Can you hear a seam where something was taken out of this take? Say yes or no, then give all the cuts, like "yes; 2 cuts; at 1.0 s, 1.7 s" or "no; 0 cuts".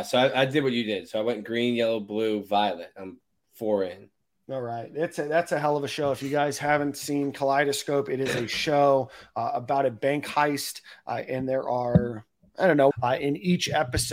yes; 1 cut; at 12.9 s